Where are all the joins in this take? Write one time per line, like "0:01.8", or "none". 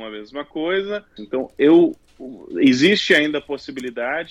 0:01.2

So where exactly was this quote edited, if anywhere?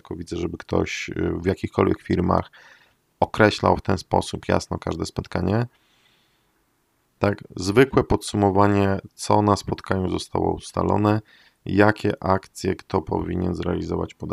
0:07.0

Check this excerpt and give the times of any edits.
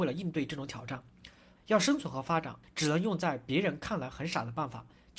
0:01.6
0:02.6

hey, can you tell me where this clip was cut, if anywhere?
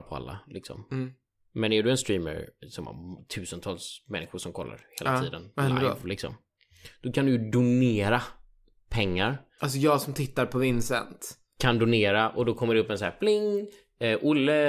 0:09.6

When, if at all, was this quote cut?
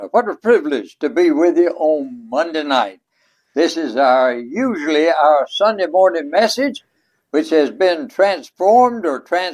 none

